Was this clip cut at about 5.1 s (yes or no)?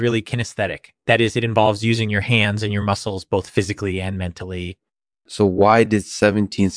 yes